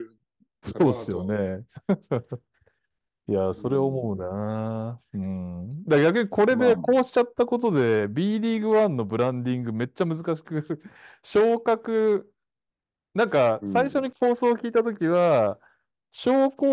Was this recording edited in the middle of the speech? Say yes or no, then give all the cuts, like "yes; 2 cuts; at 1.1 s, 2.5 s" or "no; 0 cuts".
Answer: no; 0 cuts